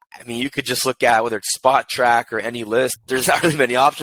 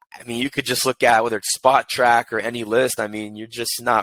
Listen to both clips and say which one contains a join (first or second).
first